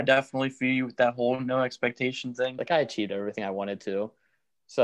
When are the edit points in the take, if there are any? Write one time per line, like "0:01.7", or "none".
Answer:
0:02.6